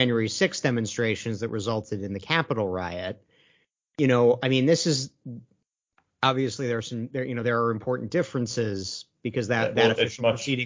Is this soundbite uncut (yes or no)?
yes